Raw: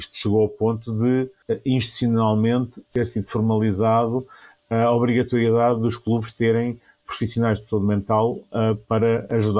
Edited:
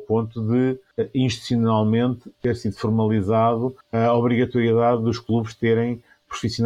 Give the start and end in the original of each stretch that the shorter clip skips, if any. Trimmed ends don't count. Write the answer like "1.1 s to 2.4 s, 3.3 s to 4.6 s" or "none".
4.3 s to 4.6 s